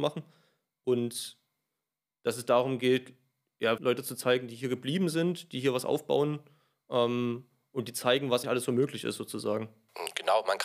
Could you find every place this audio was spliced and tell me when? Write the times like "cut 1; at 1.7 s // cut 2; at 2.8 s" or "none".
cut 1; at 3.8 s // cut 2; at 8.4 s